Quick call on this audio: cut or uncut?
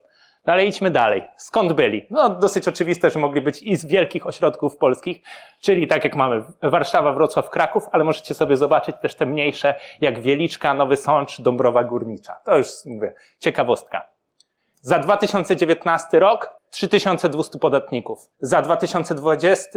cut